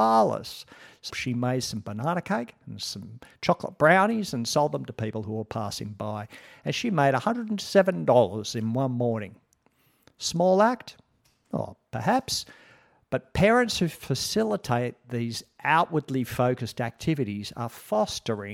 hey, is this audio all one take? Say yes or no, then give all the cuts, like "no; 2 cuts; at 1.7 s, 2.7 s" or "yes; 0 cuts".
no; 1 cut; at 1.1 s